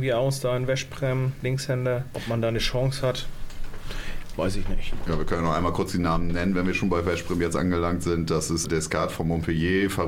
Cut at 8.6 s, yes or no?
yes